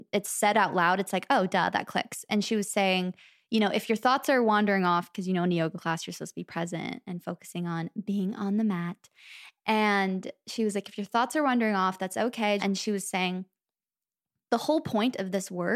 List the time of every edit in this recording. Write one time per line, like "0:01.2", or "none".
0:12.6